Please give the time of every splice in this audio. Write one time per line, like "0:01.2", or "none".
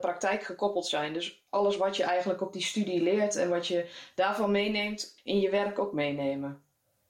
0:05.2